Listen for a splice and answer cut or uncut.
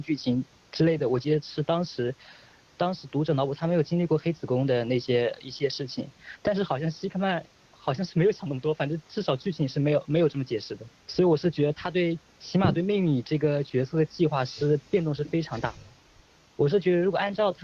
uncut